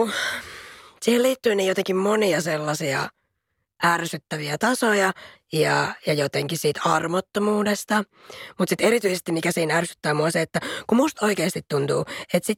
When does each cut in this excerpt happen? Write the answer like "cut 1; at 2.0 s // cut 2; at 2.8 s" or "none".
cut 1; at 5.4 s

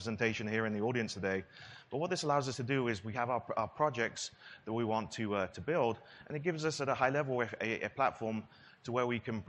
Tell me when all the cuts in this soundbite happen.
none

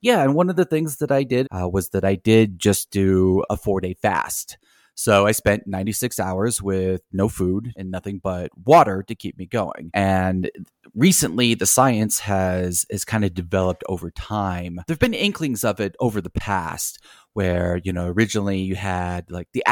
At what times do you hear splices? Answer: cut 1; at 1.4 s

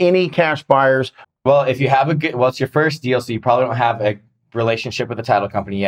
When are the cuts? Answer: cut 1; at 1.2 s

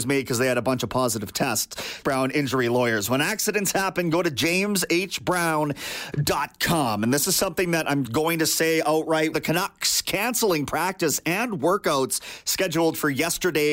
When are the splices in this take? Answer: cut 1; at 2.0 s // cut 2; at 8.1 s // cut 3; at 9.3 s

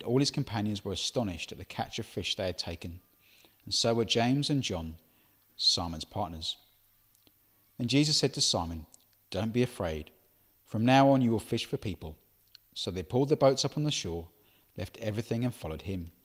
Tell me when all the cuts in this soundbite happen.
cut 1; at 5.5 s

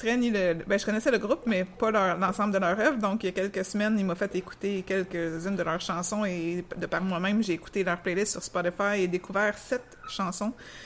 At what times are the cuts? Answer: none

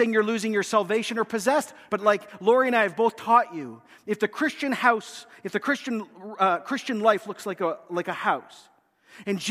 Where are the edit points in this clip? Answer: cut 1; at 1.9 s

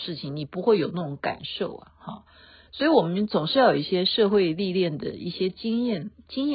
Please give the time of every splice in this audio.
none

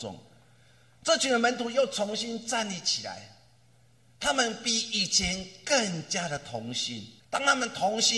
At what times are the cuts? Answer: cut 1; at 7.2 s

